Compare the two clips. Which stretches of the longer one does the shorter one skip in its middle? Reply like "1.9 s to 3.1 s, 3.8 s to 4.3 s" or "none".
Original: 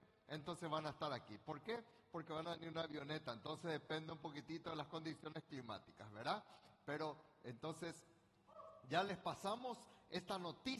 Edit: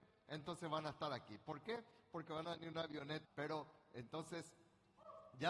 3.2 s to 6.7 s